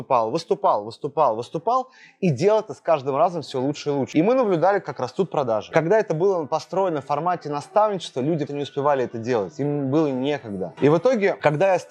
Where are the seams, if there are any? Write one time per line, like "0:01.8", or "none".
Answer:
0:08.5

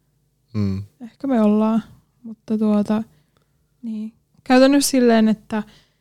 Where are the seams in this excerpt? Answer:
none

